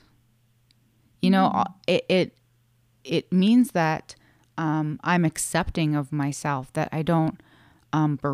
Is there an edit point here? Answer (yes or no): no